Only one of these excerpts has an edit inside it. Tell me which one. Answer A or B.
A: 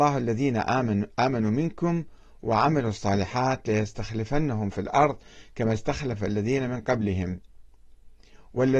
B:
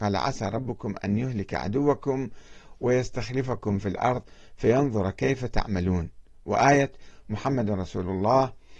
A